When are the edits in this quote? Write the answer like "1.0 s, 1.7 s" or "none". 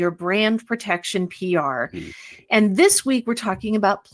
none